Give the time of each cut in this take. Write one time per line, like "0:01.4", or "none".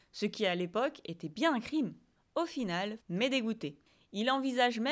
0:03.0